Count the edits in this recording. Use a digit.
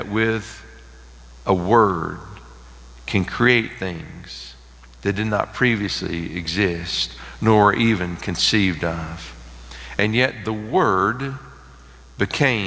0